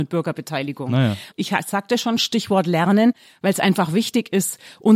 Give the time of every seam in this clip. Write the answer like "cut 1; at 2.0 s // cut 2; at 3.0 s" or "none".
cut 1; at 1.3 s